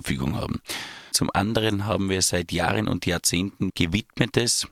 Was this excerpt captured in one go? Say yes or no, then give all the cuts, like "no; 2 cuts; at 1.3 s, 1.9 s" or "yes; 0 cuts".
no; 2 cuts; at 1.1 s, 3.7 s